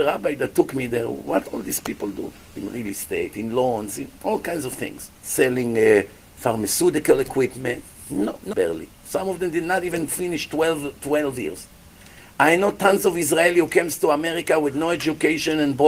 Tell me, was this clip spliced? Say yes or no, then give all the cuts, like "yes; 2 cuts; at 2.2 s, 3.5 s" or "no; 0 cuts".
yes; 3 cuts; at 2.5 s, 5.2 s, 8.5 s